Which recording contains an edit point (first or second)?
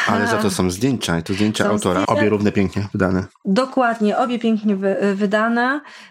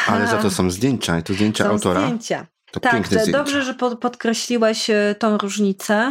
first